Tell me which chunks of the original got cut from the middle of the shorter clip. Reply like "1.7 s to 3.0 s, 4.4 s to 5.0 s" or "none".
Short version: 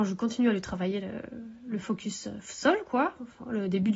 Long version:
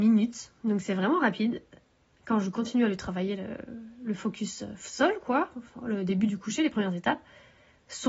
none